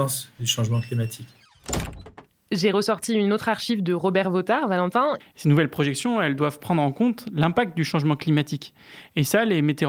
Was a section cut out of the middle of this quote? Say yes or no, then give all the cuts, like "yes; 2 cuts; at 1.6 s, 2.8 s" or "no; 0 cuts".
yes; 1 cut; at 5.2 s